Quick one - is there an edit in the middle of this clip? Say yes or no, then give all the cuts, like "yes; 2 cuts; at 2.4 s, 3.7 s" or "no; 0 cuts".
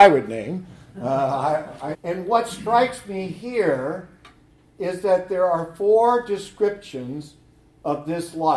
yes; 1 cut; at 1.9 s